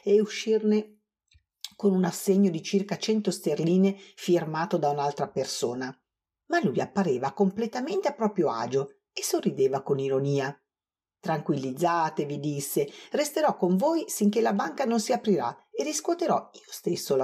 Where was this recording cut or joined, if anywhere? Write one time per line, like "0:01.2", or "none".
none